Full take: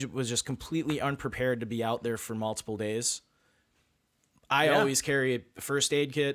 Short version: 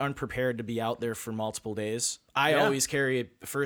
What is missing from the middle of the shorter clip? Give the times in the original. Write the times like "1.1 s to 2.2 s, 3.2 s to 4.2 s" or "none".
3.3 s to 4.4 s